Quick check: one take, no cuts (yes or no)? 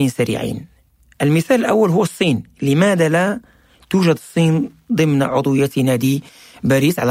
yes